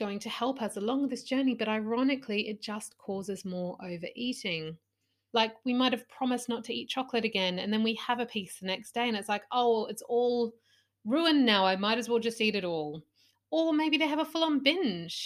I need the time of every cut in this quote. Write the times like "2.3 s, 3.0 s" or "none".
5.3 s